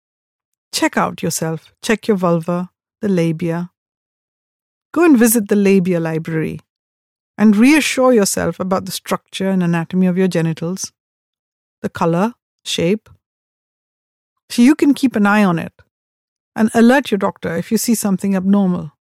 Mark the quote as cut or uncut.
cut